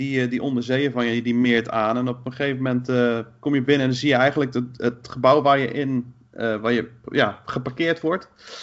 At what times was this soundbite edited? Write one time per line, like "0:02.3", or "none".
none